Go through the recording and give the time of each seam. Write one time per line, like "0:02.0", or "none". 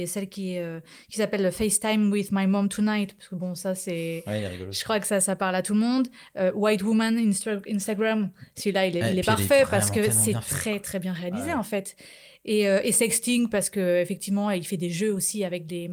none